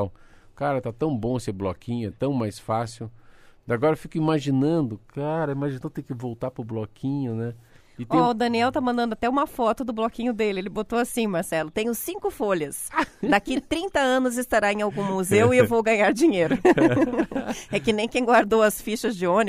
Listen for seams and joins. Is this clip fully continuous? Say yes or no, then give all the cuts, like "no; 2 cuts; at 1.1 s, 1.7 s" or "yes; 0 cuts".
yes; 0 cuts